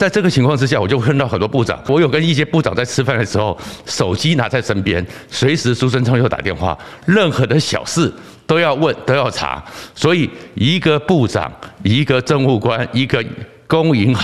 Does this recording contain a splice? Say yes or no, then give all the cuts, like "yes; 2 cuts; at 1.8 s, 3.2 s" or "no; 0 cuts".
no; 0 cuts